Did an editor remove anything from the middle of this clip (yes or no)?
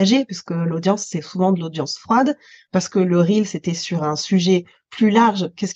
no